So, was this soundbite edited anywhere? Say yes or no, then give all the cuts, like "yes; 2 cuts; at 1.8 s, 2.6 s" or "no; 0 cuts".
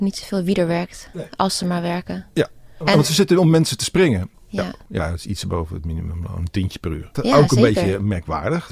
yes; 2 cuts; at 4.3 s, 7.1 s